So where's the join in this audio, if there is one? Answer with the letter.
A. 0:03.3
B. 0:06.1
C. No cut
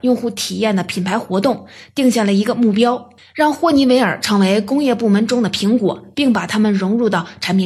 B